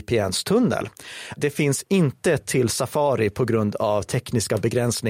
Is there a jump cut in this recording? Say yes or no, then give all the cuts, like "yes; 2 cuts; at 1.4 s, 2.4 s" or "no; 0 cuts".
yes; 1 cut; at 1.4 s